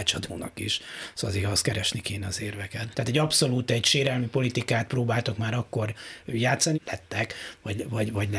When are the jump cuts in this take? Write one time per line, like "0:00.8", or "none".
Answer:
0:02.9
0:06.7